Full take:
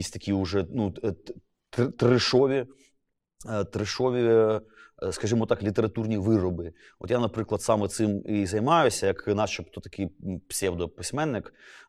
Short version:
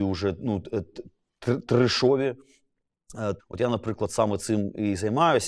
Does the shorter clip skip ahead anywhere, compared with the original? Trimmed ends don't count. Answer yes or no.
yes